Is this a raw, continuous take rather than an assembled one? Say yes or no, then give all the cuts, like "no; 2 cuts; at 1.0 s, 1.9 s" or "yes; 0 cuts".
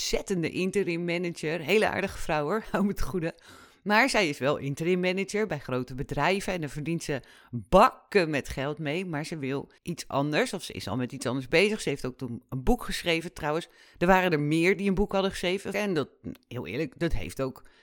no; 2 cuts; at 9.8 s, 15.7 s